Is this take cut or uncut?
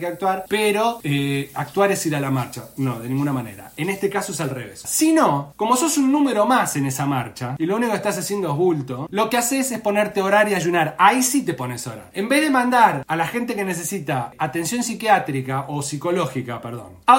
cut